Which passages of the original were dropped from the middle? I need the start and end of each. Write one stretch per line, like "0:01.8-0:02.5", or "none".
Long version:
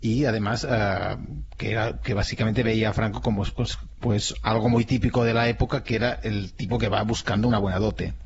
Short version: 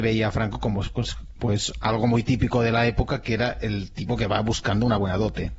none